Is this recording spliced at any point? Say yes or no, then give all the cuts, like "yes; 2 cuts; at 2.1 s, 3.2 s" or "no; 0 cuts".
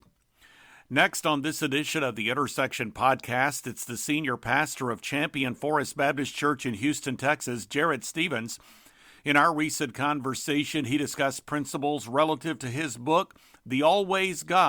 no; 0 cuts